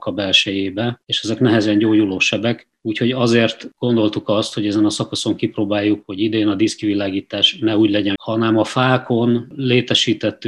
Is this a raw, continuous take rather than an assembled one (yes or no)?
no